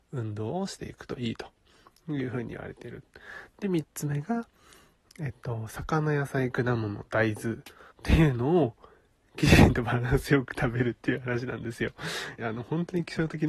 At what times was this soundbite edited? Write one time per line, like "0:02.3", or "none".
0:07.9
0:12.4